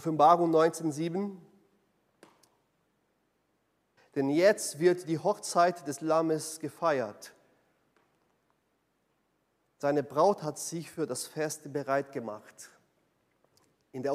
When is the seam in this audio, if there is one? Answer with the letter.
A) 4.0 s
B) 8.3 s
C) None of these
A